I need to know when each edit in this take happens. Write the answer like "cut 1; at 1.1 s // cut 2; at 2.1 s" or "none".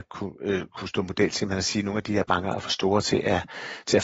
none

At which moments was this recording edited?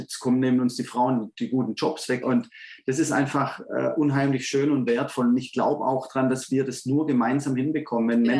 cut 1; at 2.2 s

